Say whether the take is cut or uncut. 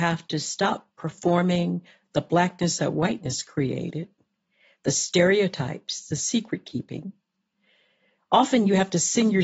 uncut